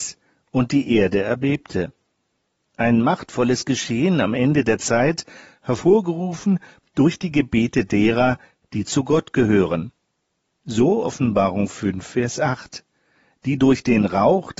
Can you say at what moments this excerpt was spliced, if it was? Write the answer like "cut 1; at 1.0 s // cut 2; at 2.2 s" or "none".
none

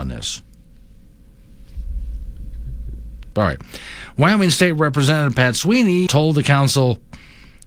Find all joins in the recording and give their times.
cut 1; at 3.3 s // cut 2; at 6.1 s

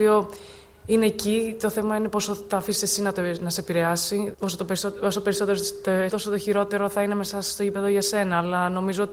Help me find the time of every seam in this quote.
cut 1; at 4.3 s // cut 2; at 6.1 s

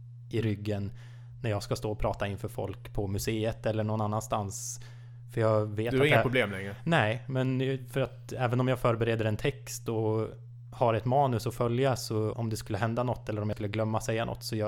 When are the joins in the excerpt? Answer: cut 1; at 12.3 s

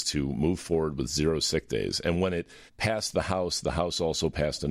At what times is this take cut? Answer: cut 1; at 2.7 s

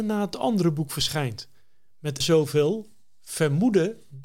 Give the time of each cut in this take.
cut 1; at 2.2 s

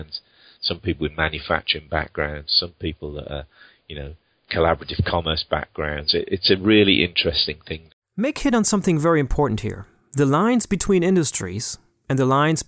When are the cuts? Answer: none

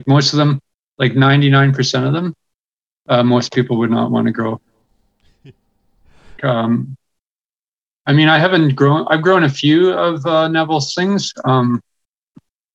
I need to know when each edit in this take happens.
cut 1; at 6.4 s

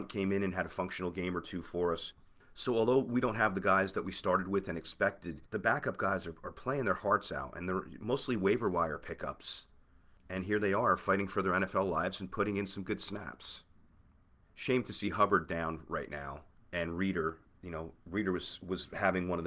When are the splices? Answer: none

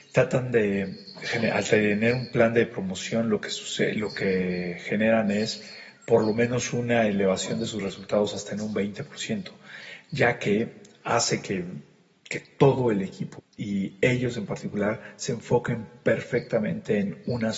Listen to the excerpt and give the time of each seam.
cut 1; at 13.4 s

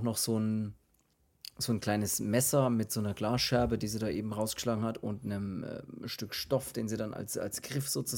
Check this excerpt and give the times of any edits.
none

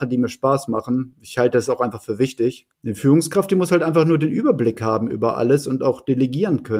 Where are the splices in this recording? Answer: cut 1; at 2.7 s

